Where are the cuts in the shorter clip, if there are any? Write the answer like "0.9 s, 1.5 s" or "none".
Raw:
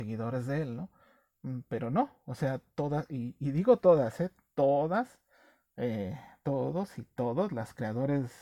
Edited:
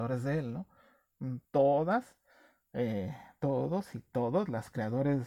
1.4 s